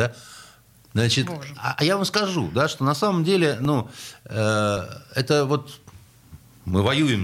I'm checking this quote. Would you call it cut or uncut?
cut